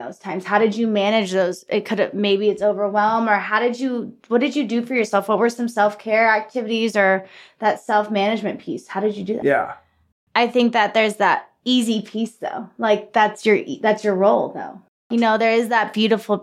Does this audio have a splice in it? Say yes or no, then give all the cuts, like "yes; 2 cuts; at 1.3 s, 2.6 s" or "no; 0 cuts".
yes; 1 cut; at 9.4 s